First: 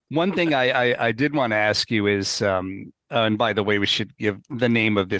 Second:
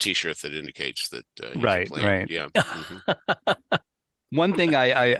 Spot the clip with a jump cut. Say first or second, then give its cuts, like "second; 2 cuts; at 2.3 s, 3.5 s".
first; 1 cut; at 3.0 s